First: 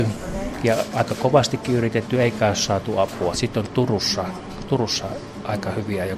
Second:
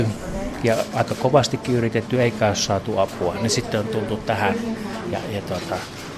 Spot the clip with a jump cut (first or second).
first